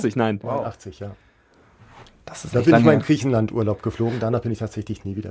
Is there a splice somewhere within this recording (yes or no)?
no